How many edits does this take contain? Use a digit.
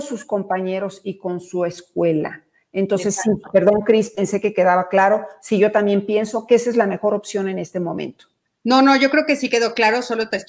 0